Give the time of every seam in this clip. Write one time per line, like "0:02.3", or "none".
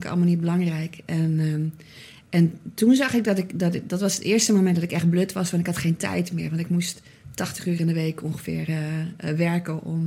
none